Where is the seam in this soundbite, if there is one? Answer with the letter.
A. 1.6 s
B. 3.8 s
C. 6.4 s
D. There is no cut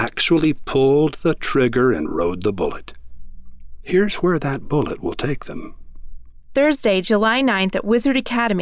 D